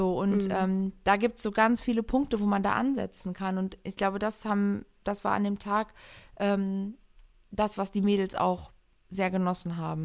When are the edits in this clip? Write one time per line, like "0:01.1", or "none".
none

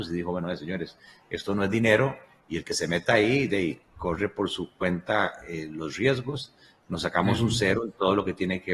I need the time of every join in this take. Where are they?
0:06.8

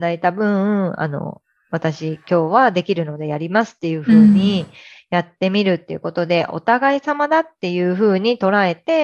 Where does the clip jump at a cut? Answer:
none

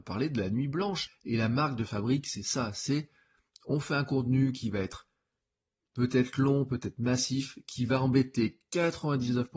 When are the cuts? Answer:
0:01.1

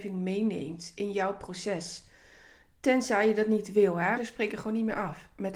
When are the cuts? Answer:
0:04.2

